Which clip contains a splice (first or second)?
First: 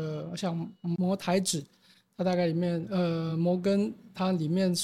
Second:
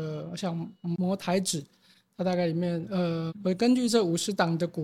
second